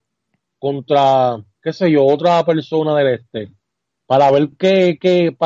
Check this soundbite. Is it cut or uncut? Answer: uncut